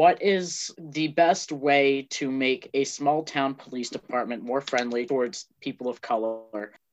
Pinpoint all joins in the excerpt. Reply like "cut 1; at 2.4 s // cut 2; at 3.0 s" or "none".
cut 1; at 5.1 s